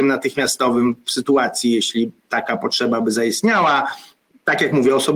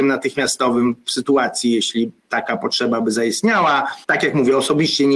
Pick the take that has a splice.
second; 1 cut; at 4.0 s

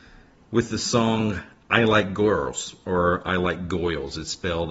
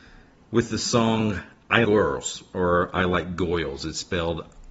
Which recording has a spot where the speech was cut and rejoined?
second; 1 cut; at 1.8 s

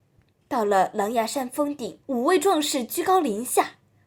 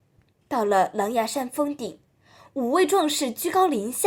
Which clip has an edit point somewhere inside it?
first; 1 cut; at 2.0 s

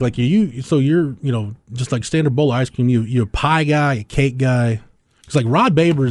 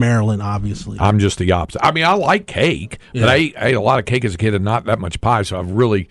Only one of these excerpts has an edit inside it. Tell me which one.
second; 1 cut; at 1.0 s

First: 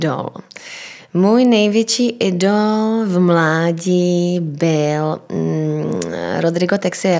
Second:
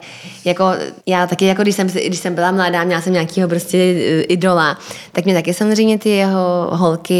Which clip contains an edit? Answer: second; 1 cut; at 1.0 s

